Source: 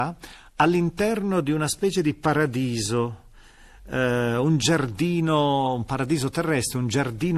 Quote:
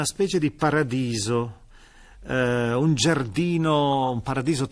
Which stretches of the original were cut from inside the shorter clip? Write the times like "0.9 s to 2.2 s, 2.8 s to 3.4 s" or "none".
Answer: none